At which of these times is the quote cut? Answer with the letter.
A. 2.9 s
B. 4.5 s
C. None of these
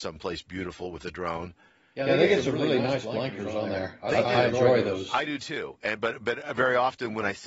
B